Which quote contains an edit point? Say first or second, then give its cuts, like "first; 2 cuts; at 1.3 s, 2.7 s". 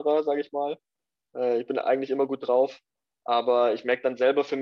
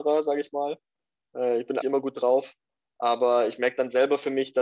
second; 1 cut; at 1.8 s